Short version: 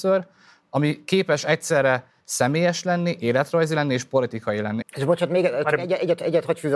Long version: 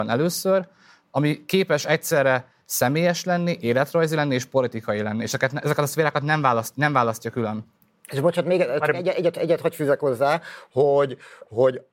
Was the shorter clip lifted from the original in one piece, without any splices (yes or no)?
no